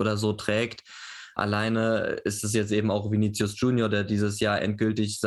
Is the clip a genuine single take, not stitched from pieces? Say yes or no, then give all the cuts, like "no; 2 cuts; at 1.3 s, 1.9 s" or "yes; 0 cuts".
yes; 0 cuts